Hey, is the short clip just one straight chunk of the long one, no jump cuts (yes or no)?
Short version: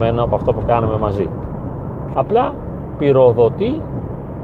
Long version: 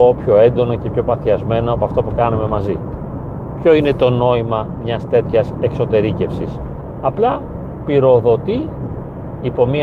no